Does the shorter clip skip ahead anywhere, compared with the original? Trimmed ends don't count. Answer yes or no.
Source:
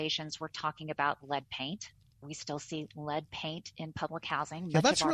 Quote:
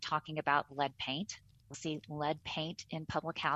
yes